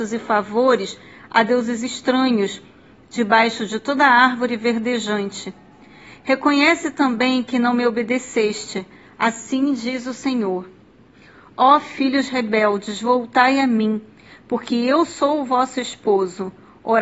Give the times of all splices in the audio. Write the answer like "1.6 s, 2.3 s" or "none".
none

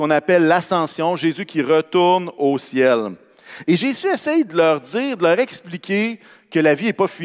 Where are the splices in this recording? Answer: none

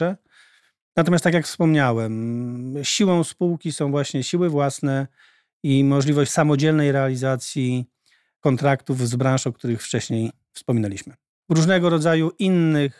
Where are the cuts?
11.4 s

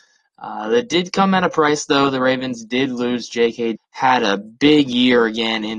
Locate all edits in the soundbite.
3.8 s

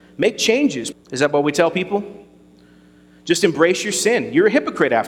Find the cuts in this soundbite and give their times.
0.9 s

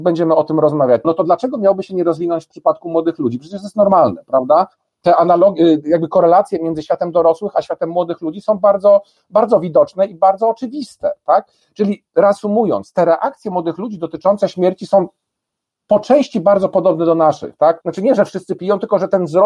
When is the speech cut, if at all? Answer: 1.0 s, 17.8 s

